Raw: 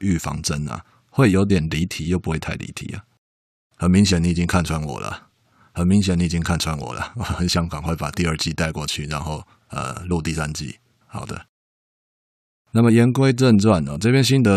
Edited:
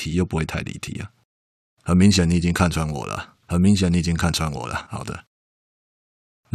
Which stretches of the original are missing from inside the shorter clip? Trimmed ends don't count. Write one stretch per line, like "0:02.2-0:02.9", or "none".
0:05.4-0:05.7
0:07.1-0:11.1